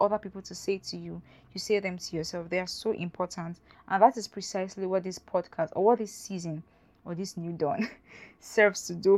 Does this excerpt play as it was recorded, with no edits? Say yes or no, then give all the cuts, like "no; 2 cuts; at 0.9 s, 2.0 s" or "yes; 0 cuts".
no; 1 cut; at 3.7 s